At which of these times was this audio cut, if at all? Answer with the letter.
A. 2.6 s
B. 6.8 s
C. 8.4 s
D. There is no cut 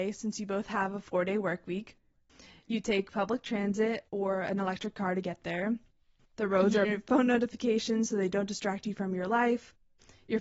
B